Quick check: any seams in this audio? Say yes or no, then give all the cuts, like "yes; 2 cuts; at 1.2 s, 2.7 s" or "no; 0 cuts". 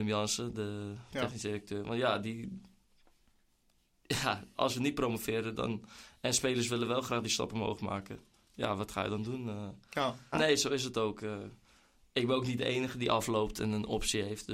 yes; 1 cut; at 10.3 s